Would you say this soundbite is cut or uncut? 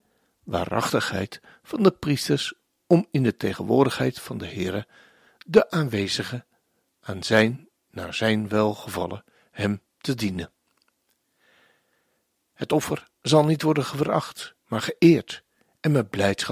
uncut